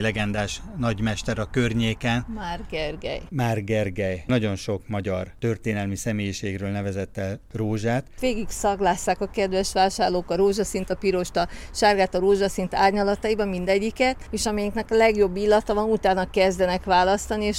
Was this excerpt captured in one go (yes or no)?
no